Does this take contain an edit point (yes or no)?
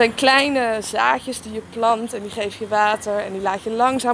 no